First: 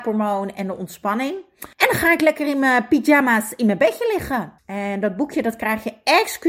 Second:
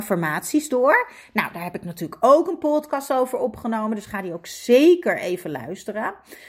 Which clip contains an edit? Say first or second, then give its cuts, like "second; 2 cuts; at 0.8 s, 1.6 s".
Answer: first; 2 cuts; at 1.7 s, 4.6 s